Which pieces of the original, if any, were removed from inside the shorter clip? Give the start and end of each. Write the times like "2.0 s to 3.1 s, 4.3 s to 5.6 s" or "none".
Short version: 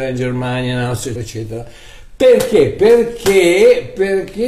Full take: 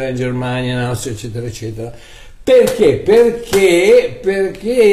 1.2 s to 1.4 s